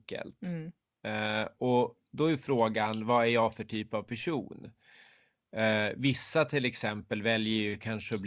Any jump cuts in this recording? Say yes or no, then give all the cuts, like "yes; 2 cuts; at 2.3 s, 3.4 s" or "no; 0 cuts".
no; 0 cuts